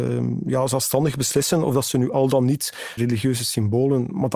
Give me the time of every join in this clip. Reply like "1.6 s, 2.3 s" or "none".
3.0 s